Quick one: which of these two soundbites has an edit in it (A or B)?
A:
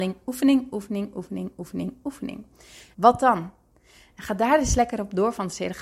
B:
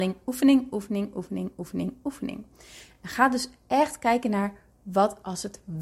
A